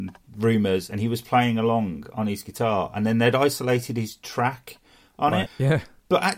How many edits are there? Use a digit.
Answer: 1